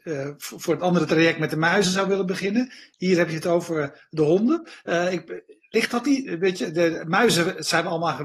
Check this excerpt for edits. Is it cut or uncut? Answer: uncut